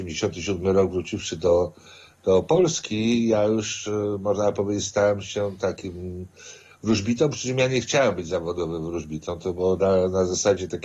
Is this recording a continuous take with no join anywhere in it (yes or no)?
yes